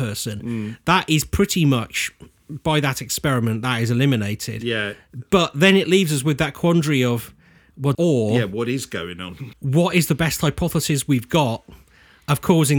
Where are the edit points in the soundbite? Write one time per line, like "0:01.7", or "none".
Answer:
0:07.9
0:09.5